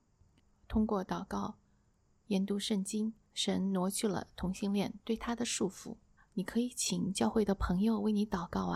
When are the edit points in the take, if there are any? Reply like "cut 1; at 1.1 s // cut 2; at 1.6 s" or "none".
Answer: cut 1; at 3.2 s // cut 2; at 6.2 s